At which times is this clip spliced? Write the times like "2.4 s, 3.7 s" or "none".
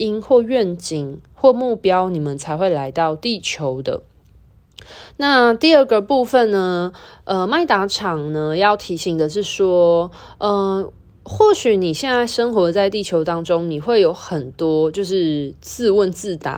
none